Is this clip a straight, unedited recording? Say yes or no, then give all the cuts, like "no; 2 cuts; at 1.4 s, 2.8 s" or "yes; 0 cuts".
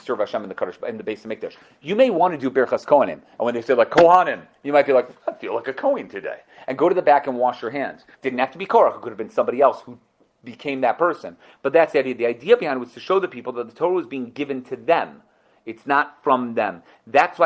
no; 1 cut; at 8.1 s